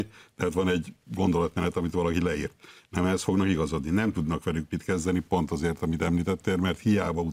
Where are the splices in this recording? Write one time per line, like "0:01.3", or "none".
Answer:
none